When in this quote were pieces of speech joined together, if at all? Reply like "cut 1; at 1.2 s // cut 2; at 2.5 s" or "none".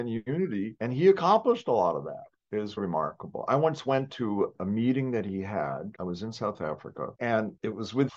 cut 1; at 2.8 s